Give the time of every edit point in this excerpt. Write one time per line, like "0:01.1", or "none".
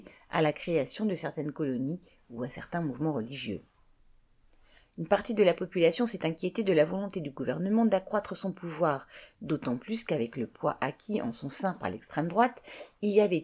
none